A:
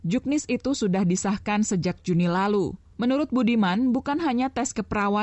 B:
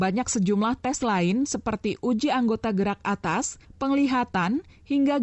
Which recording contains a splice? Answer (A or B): B